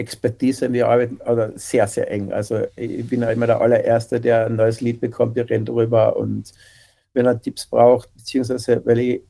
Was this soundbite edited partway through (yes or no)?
no